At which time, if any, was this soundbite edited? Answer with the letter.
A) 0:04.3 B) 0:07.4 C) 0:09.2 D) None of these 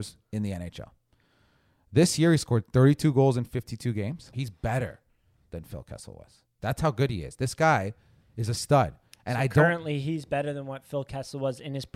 A